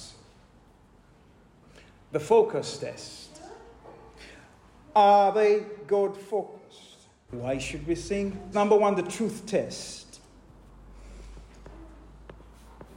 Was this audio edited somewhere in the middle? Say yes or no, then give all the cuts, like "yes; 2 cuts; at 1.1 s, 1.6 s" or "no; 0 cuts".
yes; 2 cuts; at 7.3 s, 8.5 s